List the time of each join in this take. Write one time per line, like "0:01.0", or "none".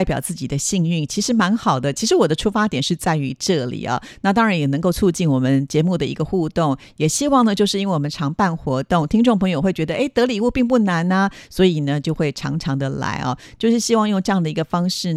none